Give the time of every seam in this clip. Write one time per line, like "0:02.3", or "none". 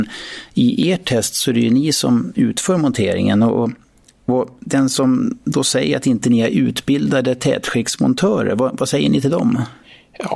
none

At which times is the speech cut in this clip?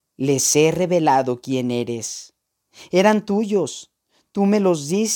none

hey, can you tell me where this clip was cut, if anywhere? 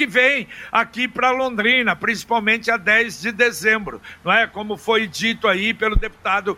none

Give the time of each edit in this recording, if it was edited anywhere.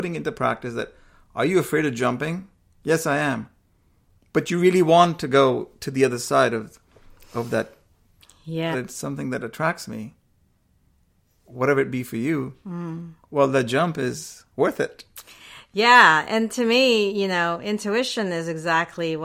0:08.7

